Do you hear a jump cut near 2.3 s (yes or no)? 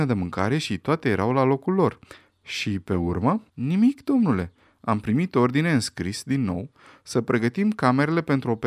yes